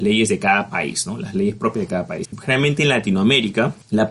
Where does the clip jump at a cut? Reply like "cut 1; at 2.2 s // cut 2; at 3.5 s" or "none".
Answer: cut 1; at 2.2 s

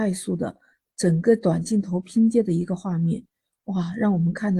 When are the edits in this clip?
none

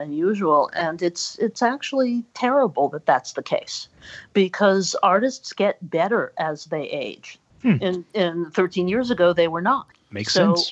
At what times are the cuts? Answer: cut 1; at 7.5 s

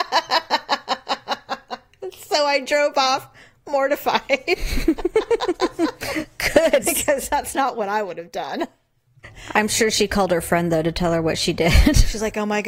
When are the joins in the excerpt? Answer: cut 1; at 6.8 s

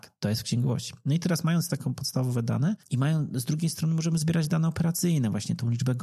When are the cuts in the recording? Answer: cut 1; at 2.8 s

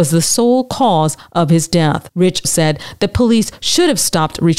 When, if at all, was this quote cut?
cut 1; at 2.4 s

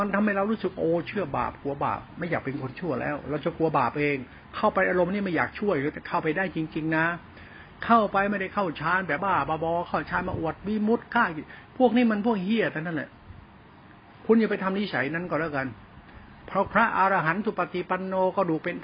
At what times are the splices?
cut 1; at 9.2 s

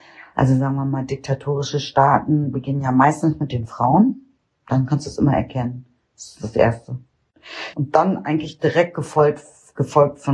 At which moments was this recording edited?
cut 1; at 7.7 s

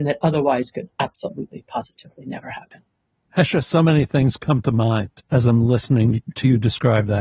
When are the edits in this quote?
cut 1; at 3.2 s // cut 2; at 5.2 s

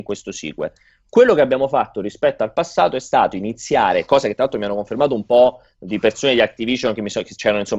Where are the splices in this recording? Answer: none

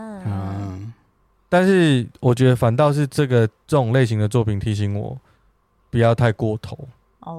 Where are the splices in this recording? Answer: none

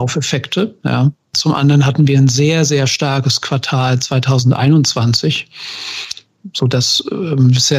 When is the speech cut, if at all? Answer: none

